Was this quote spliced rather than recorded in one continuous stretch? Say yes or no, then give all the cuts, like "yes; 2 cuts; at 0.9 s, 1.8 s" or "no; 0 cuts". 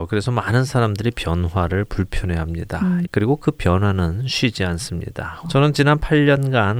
yes; 2 cuts; at 3.0 s, 5.4 s